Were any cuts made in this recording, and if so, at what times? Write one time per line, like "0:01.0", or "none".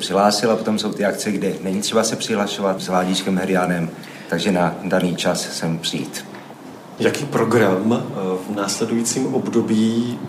0:02.8
0:07.0